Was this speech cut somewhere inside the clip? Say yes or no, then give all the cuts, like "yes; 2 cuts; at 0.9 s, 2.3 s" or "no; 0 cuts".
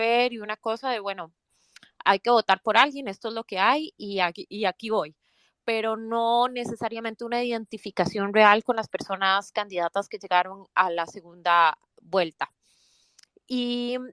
no; 0 cuts